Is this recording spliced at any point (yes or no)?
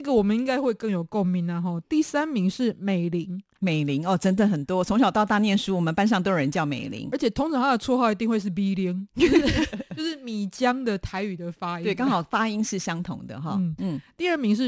no